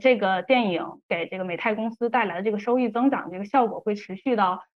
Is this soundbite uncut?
yes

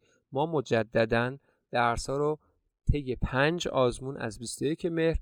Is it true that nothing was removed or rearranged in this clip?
yes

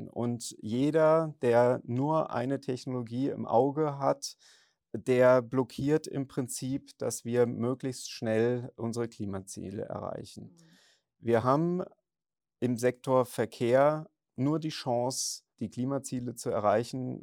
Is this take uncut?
no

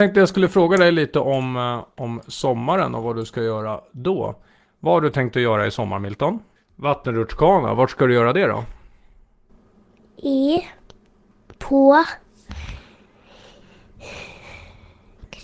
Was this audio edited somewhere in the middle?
yes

